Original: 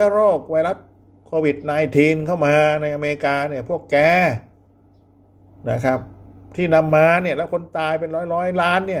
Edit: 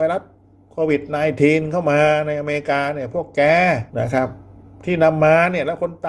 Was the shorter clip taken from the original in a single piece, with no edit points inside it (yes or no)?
no